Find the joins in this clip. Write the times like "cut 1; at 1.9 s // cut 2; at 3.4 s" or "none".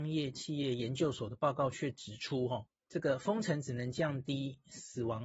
cut 1; at 2.7 s